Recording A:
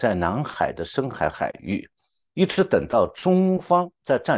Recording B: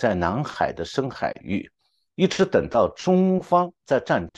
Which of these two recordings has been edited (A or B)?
B